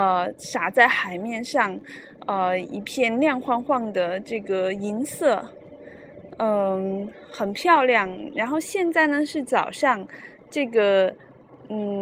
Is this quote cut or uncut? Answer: uncut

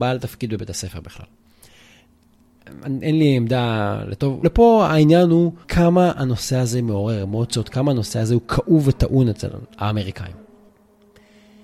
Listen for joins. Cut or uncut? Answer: cut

